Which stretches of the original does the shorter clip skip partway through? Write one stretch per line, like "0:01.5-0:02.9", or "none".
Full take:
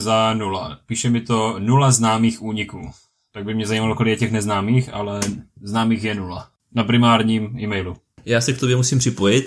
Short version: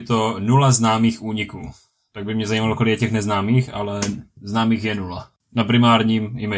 none